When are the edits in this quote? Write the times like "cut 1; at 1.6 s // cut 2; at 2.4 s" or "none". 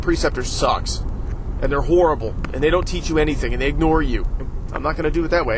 cut 1; at 4.4 s

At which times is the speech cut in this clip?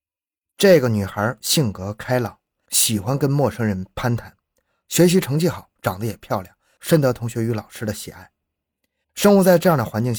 cut 1; at 9.0 s

